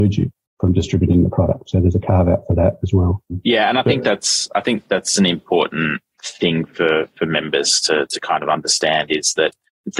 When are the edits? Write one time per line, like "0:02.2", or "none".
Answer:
none